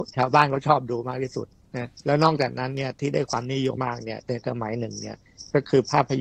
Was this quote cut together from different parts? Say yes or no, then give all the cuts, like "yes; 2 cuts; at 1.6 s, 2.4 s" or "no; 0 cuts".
yes; 1 cut; at 3.8 s